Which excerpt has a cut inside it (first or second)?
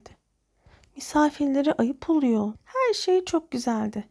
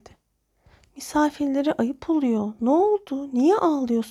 first